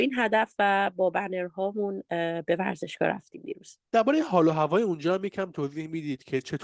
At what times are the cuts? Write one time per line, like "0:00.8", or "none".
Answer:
0:03.8

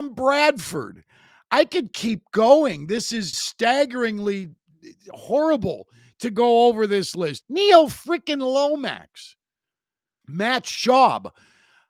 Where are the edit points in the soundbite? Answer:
0:03.3
0:07.4
0:10.2

